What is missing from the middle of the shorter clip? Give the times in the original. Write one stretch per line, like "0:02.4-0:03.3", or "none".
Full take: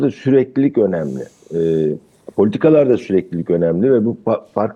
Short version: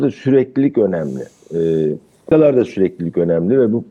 0:02.3-0:02.6